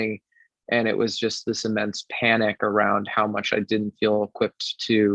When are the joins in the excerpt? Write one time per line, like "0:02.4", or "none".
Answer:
none